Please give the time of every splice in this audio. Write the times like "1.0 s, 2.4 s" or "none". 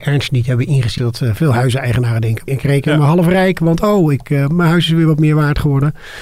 1.0 s, 2.5 s